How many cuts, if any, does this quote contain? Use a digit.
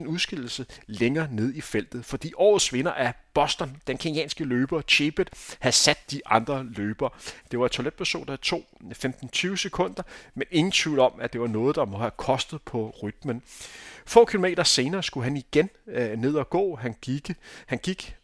1